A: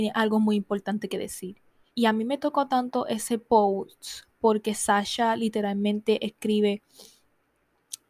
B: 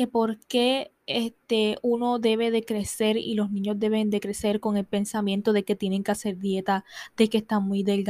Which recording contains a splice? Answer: A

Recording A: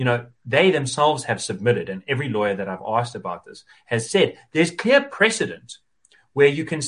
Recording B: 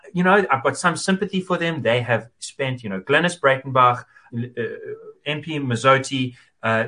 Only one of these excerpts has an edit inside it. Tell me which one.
B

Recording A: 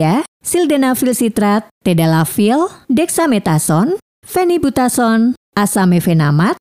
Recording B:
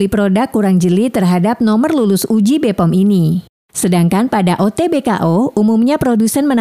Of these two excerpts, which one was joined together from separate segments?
B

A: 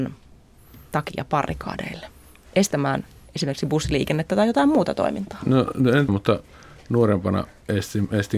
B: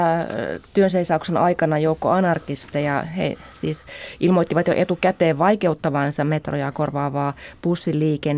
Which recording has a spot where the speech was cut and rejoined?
A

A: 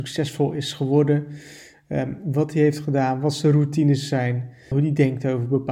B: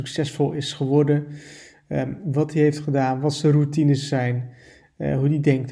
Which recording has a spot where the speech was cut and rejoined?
A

